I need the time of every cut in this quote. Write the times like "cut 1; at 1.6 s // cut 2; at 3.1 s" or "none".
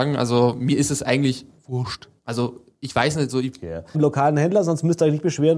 cut 1; at 2.2 s // cut 2; at 3.9 s